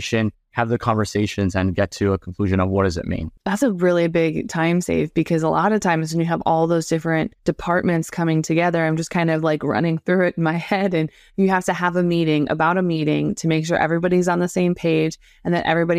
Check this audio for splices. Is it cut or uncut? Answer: cut